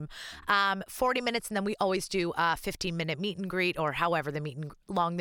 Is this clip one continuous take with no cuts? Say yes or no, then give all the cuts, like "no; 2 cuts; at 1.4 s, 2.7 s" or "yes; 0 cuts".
yes; 0 cuts